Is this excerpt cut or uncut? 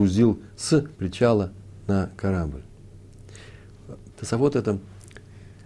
cut